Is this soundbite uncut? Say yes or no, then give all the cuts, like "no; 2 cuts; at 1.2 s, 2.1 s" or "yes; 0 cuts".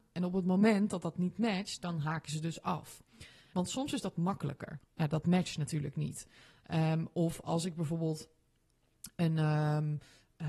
no; 2 cuts; at 3.5 s, 4.8 s